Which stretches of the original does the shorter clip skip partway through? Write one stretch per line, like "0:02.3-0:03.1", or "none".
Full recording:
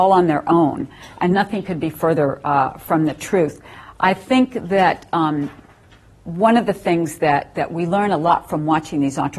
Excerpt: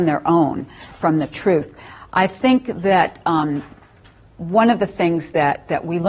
0:01.1-0:02.8